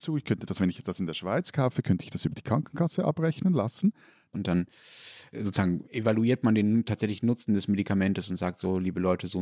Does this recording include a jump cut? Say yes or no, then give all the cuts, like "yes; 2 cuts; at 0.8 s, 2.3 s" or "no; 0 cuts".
yes; 1 cut; at 4.3 s